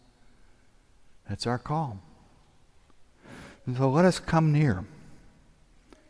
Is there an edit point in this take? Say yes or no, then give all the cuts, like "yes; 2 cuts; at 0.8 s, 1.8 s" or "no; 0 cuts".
no; 0 cuts